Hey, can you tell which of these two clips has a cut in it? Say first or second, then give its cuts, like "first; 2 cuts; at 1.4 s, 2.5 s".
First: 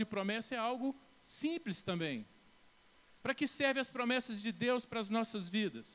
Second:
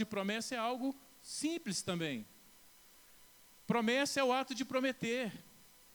first; 1 cut; at 3.2 s